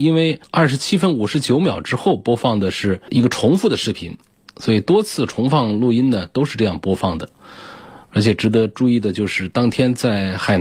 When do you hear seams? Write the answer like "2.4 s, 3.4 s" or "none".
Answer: none